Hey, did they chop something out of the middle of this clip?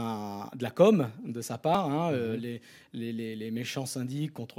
no; 0 cuts

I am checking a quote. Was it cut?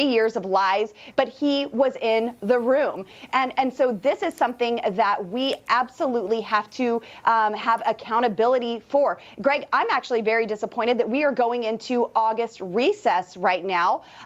yes; 1 cut; at 1.1 s

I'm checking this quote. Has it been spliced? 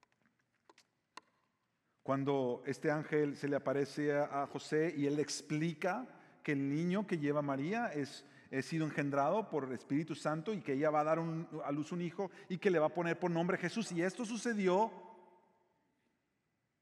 yes; 1 cut; at 13.8 s

